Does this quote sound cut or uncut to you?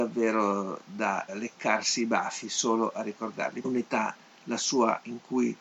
cut